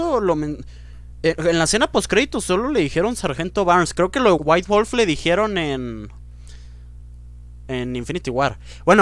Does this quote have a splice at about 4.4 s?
yes; 1 cut; at 4.4 s

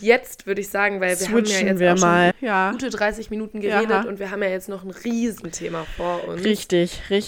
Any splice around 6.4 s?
no; 1 cut; at 2.3 s

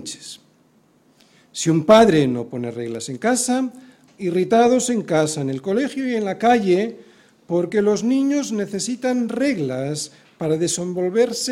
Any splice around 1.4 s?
no; 1 cut; at 4.1 s

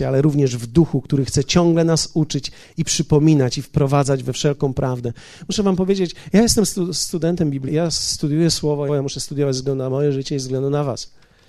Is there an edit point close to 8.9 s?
yes; 2 cuts; at 7.7 s, 8.9 s

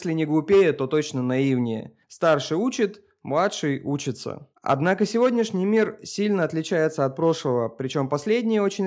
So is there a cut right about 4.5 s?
yes; 2 cuts; at 2.0 s, 4.5 s

